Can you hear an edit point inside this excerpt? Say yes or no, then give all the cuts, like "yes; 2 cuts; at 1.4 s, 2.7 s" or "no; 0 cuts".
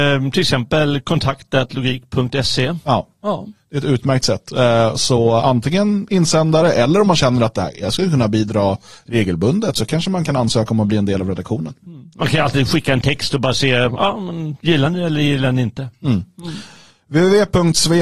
no; 0 cuts